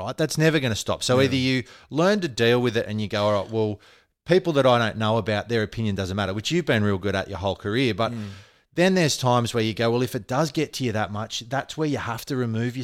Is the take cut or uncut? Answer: uncut